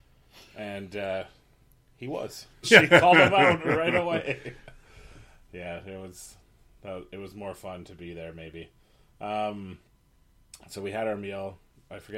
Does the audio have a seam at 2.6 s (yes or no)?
yes